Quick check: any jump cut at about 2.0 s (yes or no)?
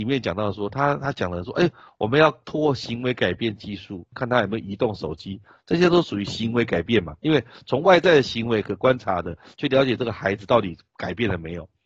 no